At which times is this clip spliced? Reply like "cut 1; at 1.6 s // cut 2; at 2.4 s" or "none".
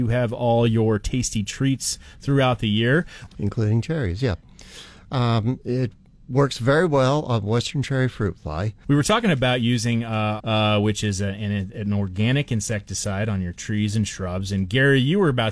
cut 1; at 3.3 s // cut 2; at 8.8 s // cut 3; at 10.4 s